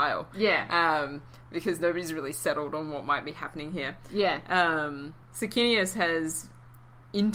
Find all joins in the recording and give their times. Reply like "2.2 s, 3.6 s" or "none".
5.2 s